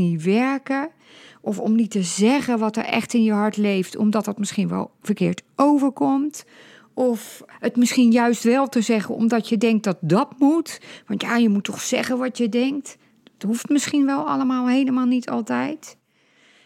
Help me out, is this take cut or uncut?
uncut